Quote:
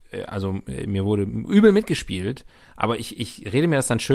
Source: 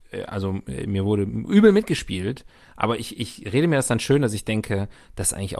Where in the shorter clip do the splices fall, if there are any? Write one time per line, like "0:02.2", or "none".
none